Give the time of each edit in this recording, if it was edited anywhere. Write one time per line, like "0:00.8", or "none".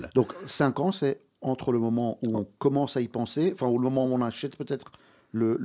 none

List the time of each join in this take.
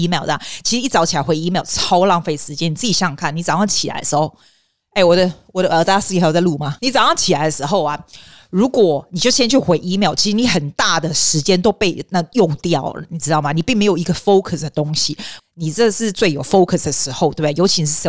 0:06.8
0:15.4

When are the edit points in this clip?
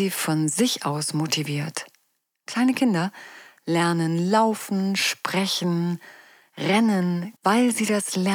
0:07.4

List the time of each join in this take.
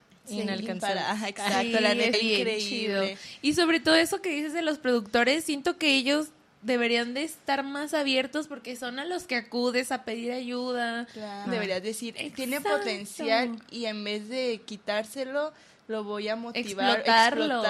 0:02.1
0:11.5

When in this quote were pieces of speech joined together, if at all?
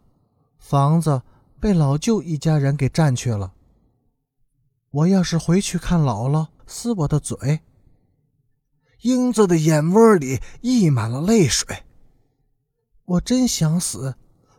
0:06.6

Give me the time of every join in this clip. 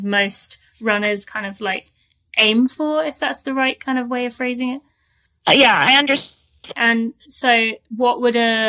0:06.7

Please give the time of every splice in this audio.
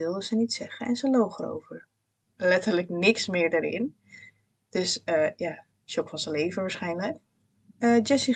0:02.3

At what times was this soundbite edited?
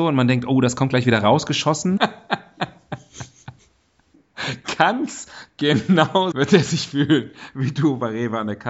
0:02.0
0:06.3

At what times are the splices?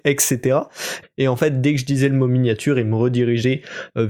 0:01.0

